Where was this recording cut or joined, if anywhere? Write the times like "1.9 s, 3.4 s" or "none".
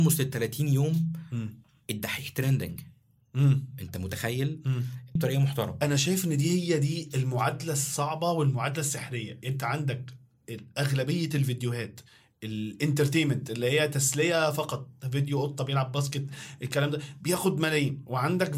5.2 s